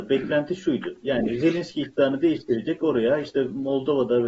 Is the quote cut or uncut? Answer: uncut